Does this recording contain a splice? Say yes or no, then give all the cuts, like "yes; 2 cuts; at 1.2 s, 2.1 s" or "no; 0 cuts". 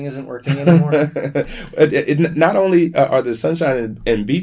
no; 0 cuts